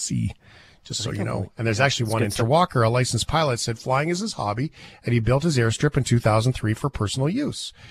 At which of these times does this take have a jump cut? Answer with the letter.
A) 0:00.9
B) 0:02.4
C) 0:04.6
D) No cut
B